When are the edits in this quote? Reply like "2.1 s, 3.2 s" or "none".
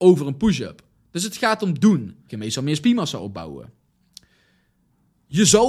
2.3 s